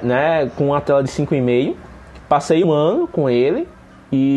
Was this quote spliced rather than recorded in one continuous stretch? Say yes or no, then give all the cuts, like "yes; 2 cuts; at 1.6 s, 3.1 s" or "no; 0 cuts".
yes; 1 cut; at 2.6 s